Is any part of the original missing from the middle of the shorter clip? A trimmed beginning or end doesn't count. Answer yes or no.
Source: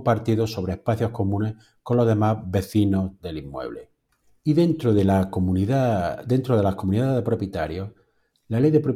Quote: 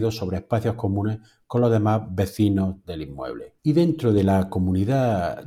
yes